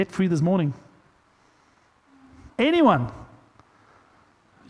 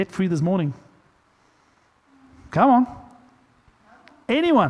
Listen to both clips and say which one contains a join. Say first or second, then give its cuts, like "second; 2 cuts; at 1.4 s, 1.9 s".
first; 1 cut; at 2.5 s